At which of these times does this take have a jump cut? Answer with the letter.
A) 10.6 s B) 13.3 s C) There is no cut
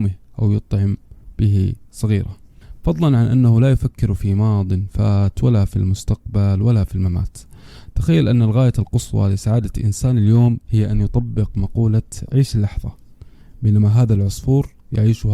A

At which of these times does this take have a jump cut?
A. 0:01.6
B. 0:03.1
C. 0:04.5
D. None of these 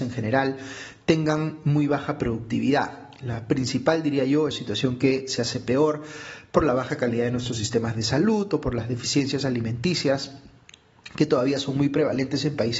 C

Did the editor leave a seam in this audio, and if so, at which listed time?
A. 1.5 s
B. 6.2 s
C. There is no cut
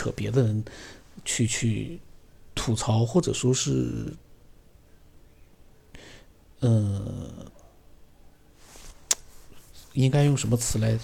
A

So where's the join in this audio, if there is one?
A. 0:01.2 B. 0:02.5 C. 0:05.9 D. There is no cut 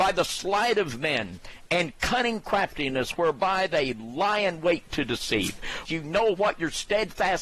C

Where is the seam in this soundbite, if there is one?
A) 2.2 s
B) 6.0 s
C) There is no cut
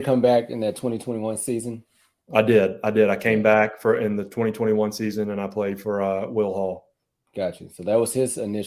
C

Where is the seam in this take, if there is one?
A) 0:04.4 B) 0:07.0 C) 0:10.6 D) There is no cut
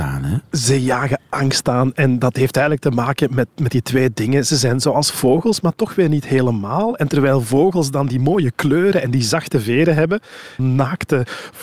C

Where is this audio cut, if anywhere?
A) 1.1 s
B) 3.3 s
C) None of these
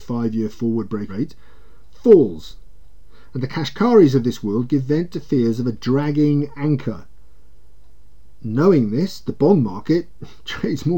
A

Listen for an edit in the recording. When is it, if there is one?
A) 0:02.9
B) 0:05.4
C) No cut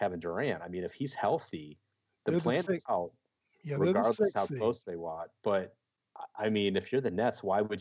A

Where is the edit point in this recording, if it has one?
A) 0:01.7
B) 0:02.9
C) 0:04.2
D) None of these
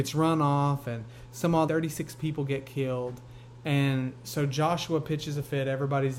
A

